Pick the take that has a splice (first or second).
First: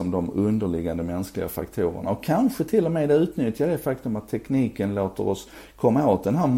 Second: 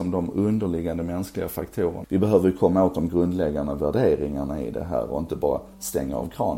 second